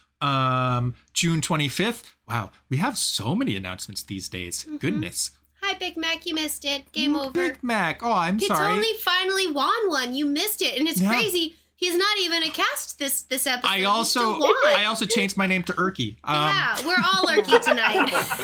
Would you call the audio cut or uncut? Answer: uncut